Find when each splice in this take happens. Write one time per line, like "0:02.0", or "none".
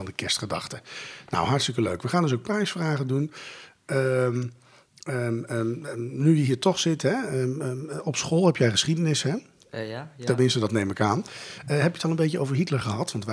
none